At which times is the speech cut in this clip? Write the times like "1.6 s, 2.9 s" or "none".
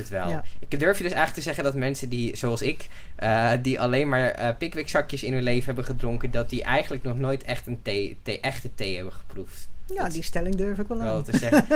none